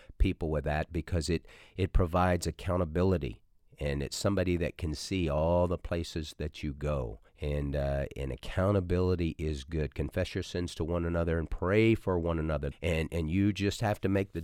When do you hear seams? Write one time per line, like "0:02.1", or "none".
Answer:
0:07.3
0:12.7